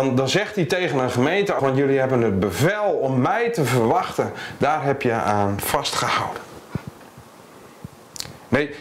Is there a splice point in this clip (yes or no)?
yes